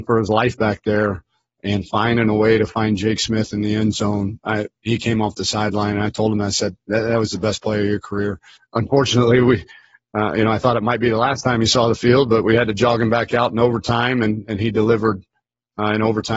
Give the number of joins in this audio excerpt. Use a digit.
1